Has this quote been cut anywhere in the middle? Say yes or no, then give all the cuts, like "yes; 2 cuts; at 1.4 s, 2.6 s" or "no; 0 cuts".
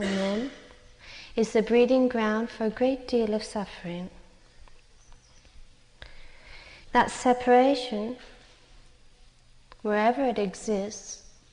yes; 1 cut; at 6.8 s